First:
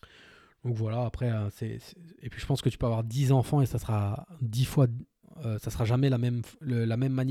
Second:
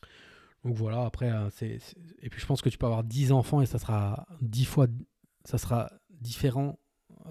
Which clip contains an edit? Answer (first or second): first